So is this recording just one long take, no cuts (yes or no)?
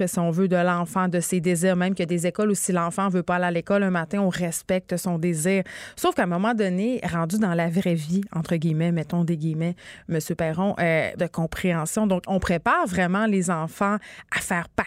no